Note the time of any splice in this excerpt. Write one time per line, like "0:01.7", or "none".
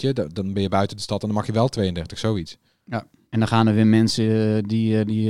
none